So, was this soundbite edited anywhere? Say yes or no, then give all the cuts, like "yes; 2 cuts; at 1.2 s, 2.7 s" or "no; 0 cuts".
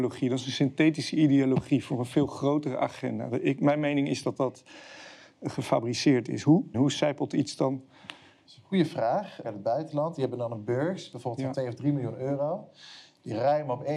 yes; 2 cuts; at 6.7 s, 9.4 s